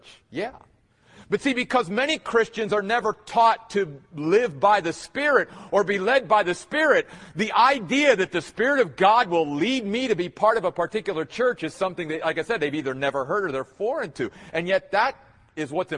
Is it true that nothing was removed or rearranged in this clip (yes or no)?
yes